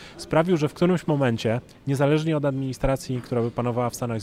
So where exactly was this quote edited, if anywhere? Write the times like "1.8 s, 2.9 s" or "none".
none